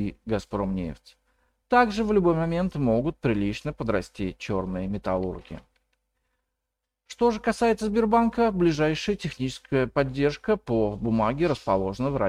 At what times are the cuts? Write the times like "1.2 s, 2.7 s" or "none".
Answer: none